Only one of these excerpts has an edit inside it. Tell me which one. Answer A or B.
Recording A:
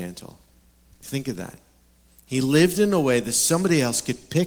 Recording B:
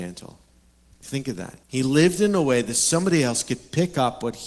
B